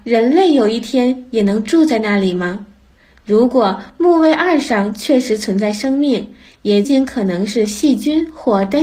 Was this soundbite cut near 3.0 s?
no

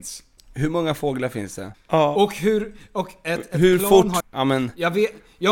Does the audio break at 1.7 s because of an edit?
yes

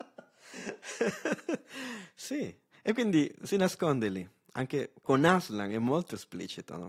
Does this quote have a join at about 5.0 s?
yes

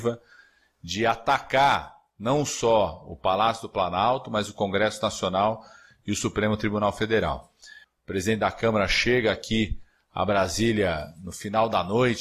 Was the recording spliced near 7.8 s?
yes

